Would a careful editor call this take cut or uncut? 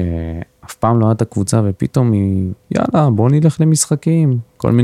cut